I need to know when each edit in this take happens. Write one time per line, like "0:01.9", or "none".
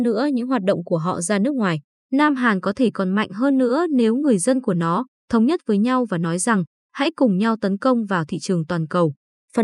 0:02.0
0:05.2

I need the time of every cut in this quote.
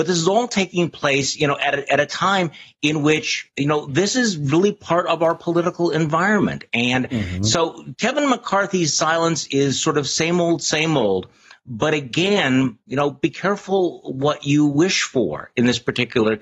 none

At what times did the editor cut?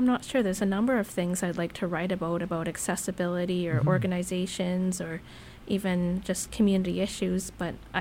none

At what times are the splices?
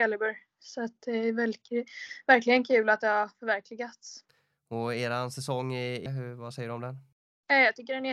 0:06.1

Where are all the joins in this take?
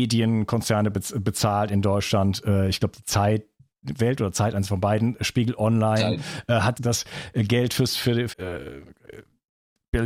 0:06.7
0:08.3

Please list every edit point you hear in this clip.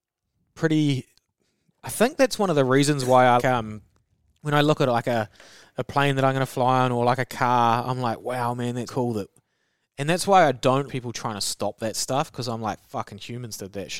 0:03.4
0:08.9
0:10.9

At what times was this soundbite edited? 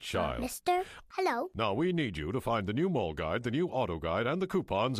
0:01.1

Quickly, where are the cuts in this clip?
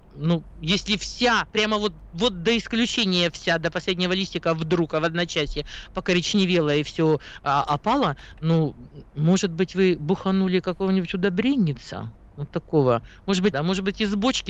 0:01.5
0:13.5

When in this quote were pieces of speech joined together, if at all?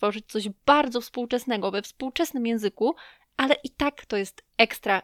none

